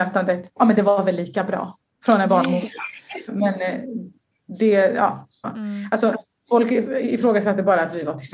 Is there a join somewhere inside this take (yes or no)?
yes